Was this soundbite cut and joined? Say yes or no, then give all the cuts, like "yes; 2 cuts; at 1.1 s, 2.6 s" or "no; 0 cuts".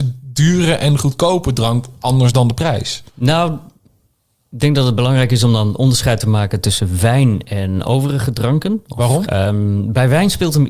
yes; 2 cuts; at 3.1 s, 9.2 s